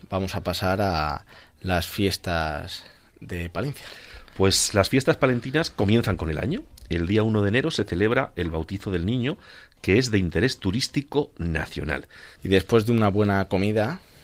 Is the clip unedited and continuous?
no; 1 cut; at 12.4 s

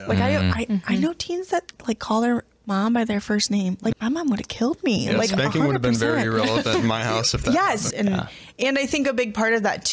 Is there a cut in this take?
yes; 2 cuts; at 3.9 s, 7.9 s

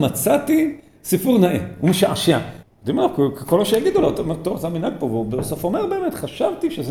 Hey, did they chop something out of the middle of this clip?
yes; 1 cut; at 2.6 s

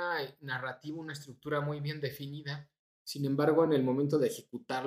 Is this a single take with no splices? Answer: yes; 0 cuts

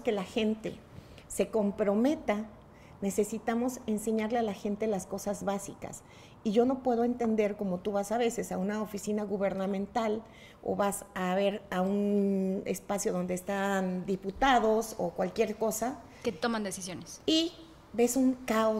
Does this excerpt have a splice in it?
no; 0 cuts

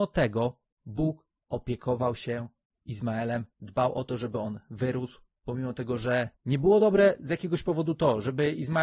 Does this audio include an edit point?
no; 0 cuts

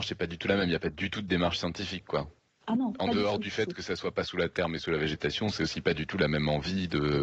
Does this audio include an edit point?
no; 0 cuts

